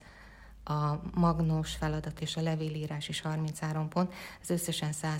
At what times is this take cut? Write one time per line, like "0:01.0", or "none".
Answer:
0:02.2